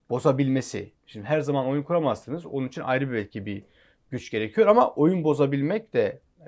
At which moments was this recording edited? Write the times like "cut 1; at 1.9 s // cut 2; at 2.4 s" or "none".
none

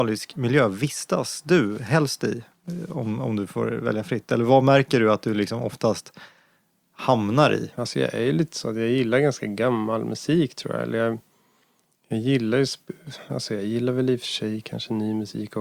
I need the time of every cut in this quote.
none

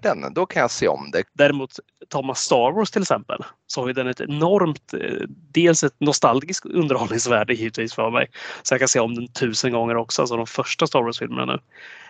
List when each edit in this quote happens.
cut 1; at 1.2 s

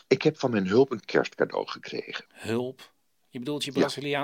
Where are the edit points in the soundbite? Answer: none

